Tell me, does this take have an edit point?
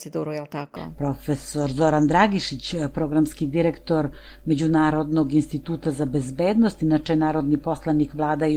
no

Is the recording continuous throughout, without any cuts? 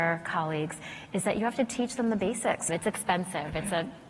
no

